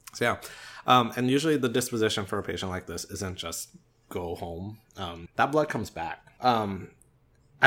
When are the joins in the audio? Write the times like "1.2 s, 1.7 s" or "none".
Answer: 5.3 s, 6.4 s